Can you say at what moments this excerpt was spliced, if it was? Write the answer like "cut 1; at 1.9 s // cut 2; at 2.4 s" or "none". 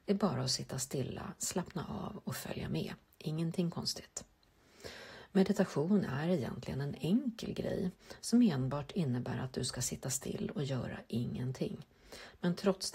none